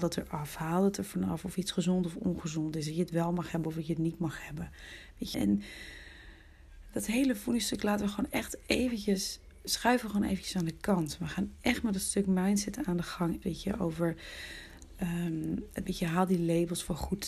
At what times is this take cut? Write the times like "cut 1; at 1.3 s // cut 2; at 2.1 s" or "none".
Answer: cut 1; at 5.3 s // cut 2; at 13.4 s // cut 3; at 15.9 s